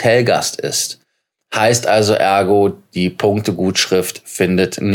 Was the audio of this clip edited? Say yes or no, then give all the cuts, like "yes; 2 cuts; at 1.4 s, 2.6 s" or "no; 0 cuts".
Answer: no; 0 cuts